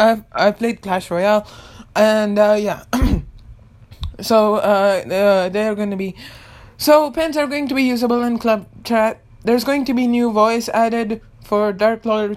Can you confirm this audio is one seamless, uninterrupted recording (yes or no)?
yes